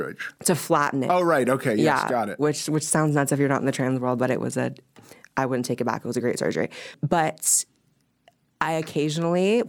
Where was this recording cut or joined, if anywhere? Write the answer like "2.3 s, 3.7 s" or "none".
none

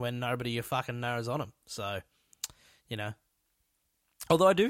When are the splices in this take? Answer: none

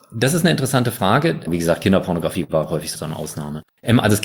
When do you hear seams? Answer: 1.5 s, 2.9 s

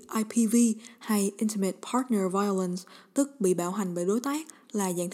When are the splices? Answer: none

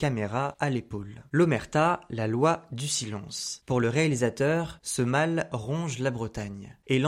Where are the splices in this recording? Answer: none

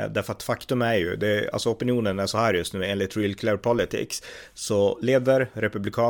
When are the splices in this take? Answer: none

